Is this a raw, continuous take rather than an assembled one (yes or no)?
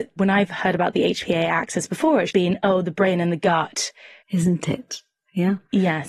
no